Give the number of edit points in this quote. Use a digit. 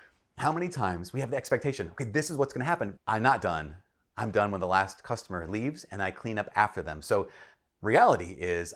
1